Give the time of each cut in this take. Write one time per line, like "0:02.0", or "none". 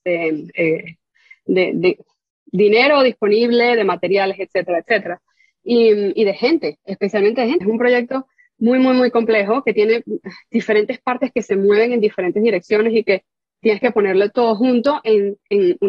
0:07.6